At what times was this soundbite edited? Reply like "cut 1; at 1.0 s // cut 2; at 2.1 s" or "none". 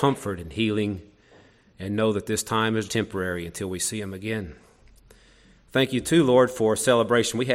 cut 1; at 2.9 s